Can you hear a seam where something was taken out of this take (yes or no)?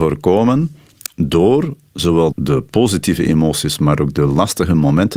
yes